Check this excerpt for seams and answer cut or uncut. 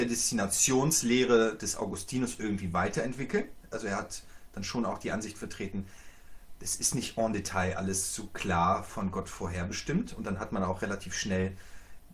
uncut